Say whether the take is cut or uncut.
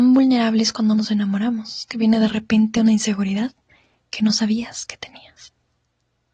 uncut